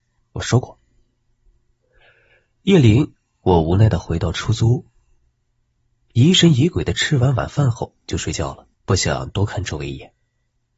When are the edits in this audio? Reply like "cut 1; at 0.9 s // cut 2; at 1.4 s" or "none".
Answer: cut 1; at 8.7 s